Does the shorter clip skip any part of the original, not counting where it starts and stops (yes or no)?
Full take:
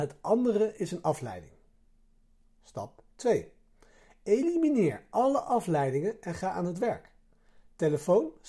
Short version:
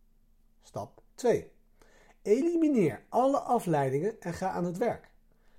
no